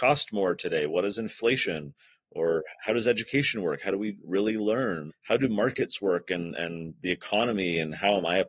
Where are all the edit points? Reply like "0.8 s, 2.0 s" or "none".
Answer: 5.1 s